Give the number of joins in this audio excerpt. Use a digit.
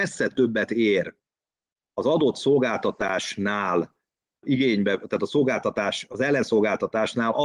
1